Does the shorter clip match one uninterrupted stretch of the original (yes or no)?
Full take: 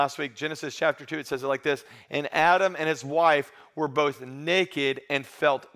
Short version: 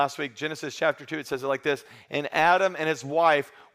yes